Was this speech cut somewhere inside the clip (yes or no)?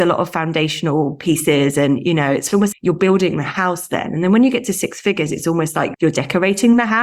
yes